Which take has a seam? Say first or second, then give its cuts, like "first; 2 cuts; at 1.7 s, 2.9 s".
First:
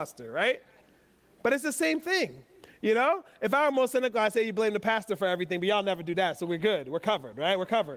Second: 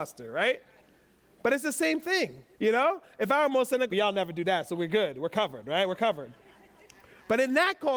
second; 2 cuts; at 2.5 s, 3.9 s